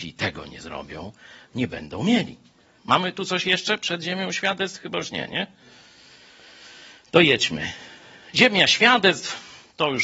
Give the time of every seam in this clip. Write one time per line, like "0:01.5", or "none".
0:02.8